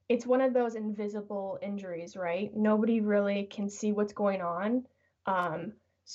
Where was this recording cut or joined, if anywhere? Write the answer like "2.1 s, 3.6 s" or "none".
none